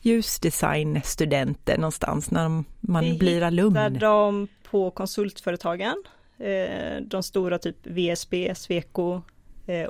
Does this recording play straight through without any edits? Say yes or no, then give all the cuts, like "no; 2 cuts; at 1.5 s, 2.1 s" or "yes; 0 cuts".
yes; 0 cuts